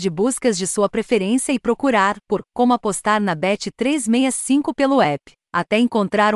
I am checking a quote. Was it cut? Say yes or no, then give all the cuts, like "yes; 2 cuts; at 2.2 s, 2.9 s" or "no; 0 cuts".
no; 0 cuts